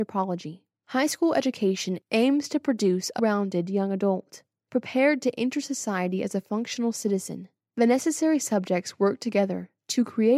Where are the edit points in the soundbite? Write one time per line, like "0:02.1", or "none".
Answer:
0:03.2